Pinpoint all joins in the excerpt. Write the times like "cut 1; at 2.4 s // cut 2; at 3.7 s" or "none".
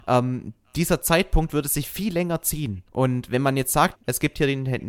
cut 1; at 2.9 s // cut 2; at 3.9 s